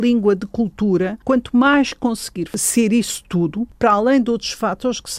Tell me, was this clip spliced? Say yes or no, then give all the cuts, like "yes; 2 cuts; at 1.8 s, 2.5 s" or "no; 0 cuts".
no; 0 cuts